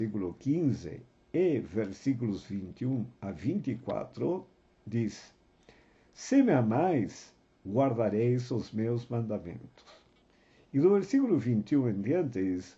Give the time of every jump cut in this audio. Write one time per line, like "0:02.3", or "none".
none